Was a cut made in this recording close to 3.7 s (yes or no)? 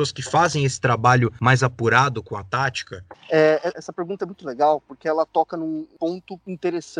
yes